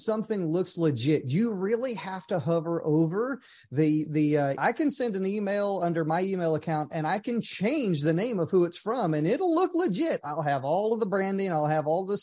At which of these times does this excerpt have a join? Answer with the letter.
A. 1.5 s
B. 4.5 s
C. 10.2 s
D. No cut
B